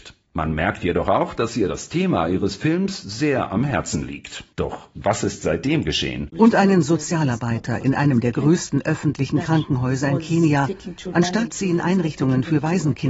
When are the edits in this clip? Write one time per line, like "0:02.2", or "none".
0:04.5
0:06.3
0:11.1